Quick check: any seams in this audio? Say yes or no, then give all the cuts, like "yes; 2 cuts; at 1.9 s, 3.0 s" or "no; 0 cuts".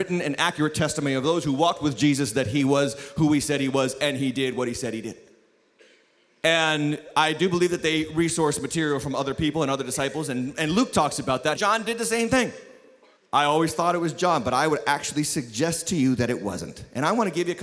yes; 2 cuts; at 11.5 s, 13.2 s